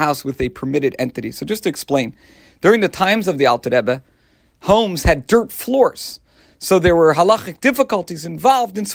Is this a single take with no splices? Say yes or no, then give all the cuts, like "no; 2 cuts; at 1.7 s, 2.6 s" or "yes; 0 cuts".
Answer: yes; 0 cuts